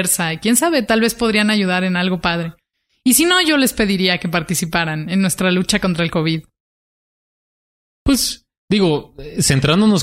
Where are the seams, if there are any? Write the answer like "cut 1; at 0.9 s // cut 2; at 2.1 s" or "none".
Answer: none